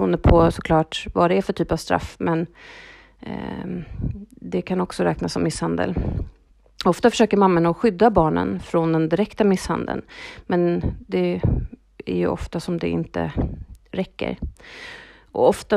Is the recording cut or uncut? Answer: uncut